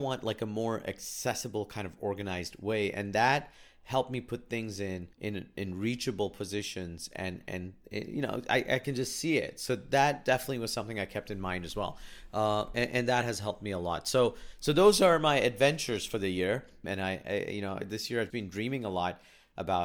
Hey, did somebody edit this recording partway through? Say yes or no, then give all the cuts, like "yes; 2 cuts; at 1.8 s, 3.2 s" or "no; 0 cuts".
yes; 3 cuts; at 5.1 s, 16.8 s, 18.3 s